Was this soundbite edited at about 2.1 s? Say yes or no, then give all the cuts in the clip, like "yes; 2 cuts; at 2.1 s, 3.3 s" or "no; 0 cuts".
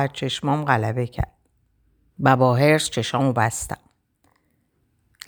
yes; 1 cut; at 2.1 s